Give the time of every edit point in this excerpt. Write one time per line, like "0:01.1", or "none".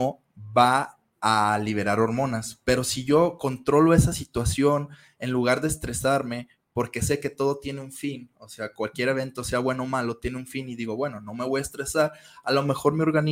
none